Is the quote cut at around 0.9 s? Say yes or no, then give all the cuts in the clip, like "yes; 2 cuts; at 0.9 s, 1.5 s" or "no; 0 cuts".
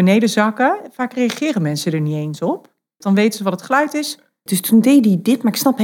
no; 2 cuts; at 3.0 s, 4.5 s